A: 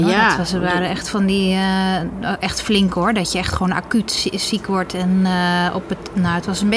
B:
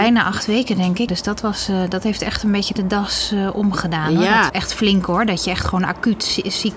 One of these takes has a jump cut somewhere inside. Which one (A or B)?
B